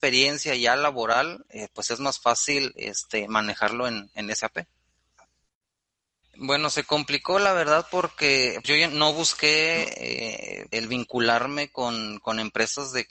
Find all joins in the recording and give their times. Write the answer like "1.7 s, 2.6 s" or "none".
6.2 s, 8.6 s, 10.7 s